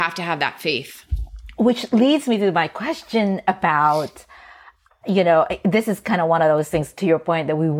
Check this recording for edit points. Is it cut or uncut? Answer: uncut